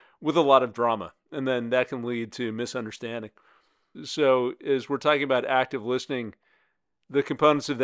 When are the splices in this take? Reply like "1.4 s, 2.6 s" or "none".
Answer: 3.9 s

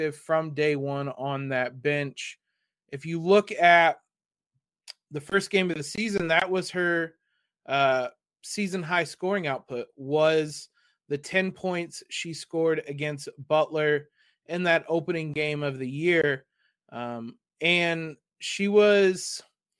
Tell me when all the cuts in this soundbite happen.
none

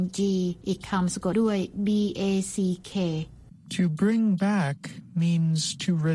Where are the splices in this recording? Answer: 1.3 s

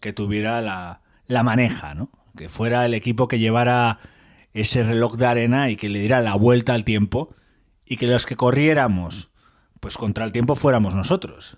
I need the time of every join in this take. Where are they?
none

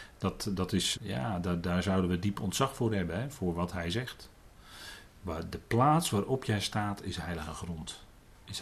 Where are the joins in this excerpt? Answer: 0.9 s

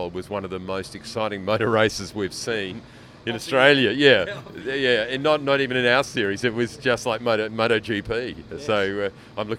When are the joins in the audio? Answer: none

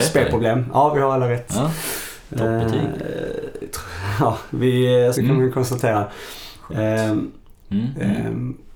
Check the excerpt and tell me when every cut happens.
5.1 s, 7.6 s

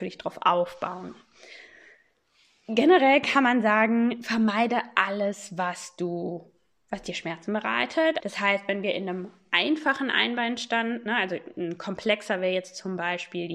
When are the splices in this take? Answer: 8.2 s

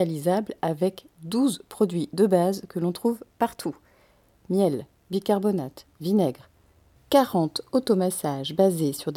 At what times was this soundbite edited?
7.0 s

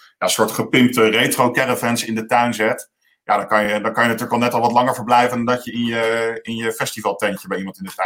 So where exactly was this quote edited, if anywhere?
none

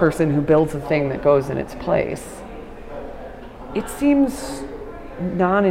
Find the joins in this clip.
none

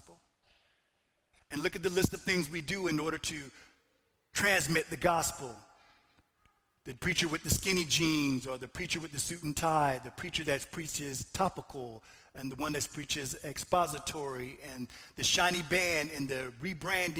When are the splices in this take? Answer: 1.4 s

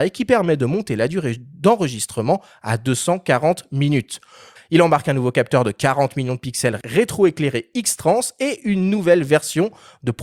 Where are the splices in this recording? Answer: 4.6 s

